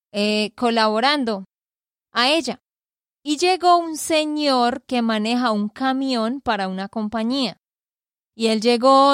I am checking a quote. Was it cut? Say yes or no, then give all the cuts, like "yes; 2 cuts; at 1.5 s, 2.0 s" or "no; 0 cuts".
no; 0 cuts